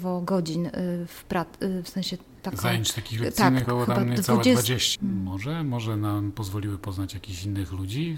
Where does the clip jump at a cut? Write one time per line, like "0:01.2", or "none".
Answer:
0:03.6
0:05.0